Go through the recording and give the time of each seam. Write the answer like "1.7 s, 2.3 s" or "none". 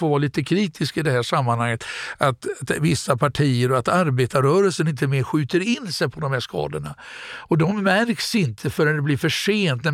none